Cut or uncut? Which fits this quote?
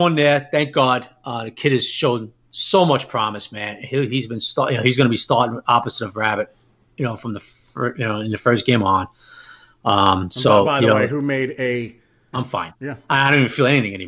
cut